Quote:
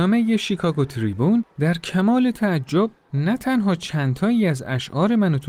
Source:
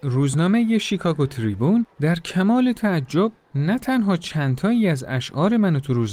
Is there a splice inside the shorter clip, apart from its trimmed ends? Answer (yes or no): no